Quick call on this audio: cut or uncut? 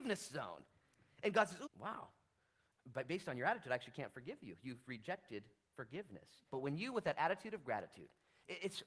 cut